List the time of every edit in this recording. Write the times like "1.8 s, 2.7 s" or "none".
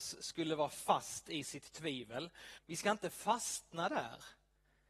2.6 s